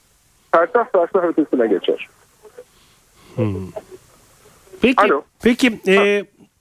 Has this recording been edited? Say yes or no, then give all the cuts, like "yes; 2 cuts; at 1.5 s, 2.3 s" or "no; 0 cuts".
yes; 1 cut; at 5.4 s